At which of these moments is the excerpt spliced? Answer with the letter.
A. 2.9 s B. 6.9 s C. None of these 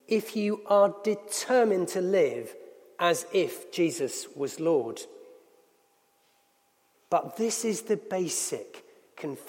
B